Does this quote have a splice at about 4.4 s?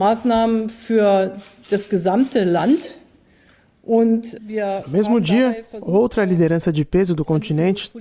yes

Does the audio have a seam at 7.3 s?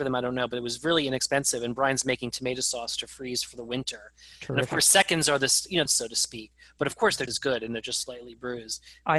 yes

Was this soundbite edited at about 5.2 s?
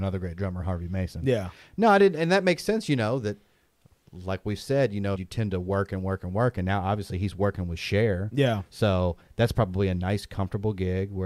yes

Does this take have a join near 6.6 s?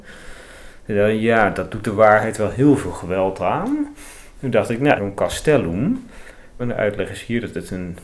yes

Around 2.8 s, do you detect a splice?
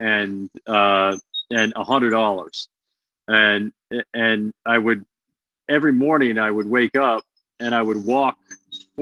no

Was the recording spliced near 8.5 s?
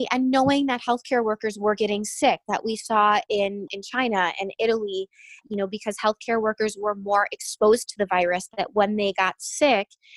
no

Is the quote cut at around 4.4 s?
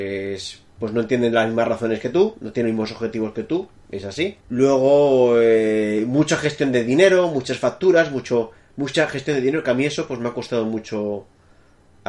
yes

